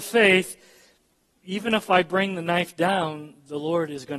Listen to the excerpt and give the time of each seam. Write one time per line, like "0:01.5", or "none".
0:01.4